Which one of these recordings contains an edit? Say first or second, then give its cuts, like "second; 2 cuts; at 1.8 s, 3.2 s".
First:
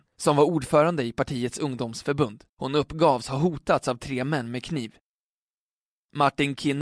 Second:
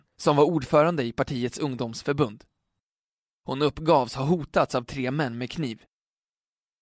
first; 1 cut; at 2.5 s